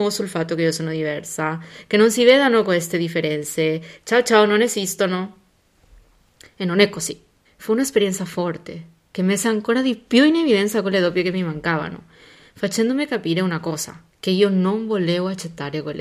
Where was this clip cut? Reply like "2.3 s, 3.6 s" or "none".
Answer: 7.4 s, 14.1 s